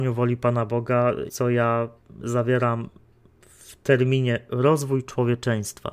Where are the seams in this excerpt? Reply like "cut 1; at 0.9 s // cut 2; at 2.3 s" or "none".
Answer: cut 1; at 1.3 s